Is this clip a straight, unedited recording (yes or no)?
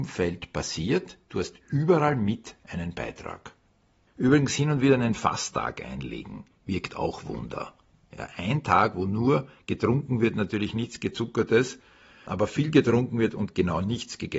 no